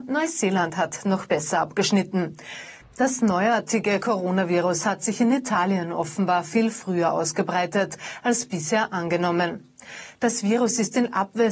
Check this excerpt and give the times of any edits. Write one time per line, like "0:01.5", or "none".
0:02.8